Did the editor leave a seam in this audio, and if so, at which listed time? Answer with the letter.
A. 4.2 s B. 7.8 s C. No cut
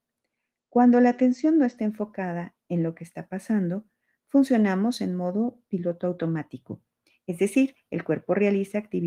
C